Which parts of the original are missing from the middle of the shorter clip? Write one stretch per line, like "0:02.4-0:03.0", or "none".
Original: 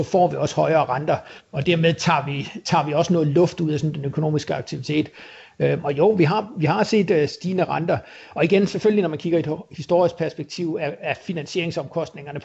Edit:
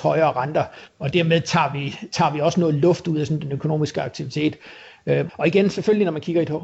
0:05.8-0:08.3